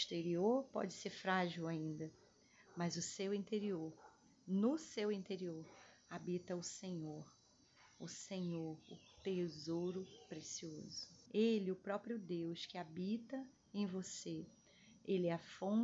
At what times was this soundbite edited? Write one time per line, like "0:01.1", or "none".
0:11.3